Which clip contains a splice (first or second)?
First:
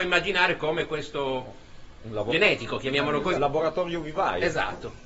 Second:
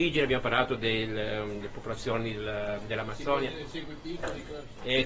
first